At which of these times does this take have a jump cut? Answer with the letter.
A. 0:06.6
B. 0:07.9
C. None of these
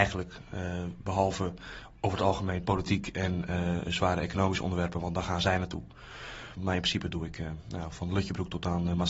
A